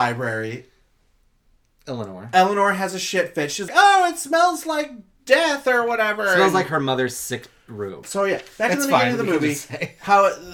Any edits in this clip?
yes; 2 cuts; at 3.7 s, 8.0 s

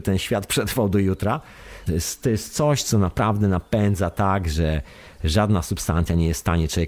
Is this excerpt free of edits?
no; 1 cut; at 1.9 s

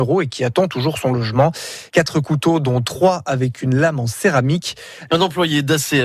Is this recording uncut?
no; 2 cuts; at 1.9 s, 5.1 s

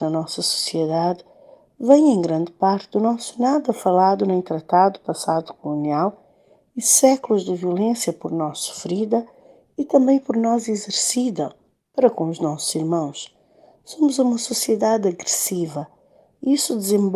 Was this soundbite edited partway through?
no; 0 cuts

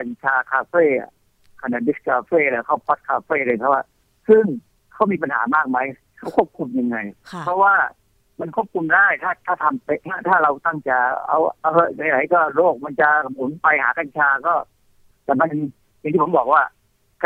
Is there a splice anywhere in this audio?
yes; 1 cut; at 10.8 s

